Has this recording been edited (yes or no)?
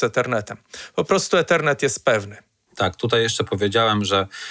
no